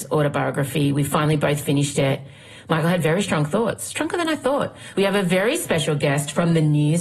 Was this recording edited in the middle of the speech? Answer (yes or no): yes